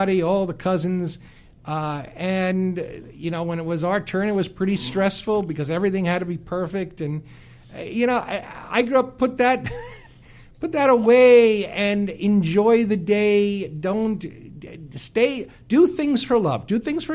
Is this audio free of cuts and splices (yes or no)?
yes